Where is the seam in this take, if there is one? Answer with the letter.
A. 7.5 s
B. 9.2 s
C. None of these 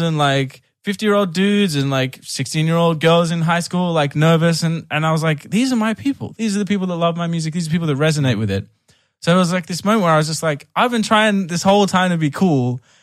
C